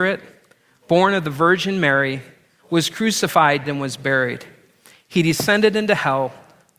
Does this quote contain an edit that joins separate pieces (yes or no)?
yes